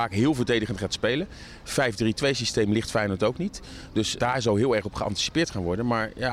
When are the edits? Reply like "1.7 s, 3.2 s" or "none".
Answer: 4.2 s